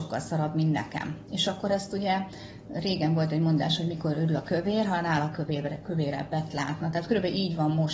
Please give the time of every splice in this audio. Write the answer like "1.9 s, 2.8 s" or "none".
none